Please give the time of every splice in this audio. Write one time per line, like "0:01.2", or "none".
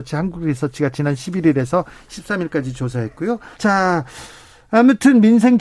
0:03.5